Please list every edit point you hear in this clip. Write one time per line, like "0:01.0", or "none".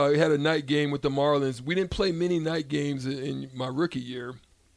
none